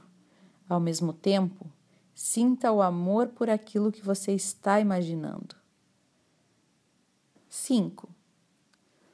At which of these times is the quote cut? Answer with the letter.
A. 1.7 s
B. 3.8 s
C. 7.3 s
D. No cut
C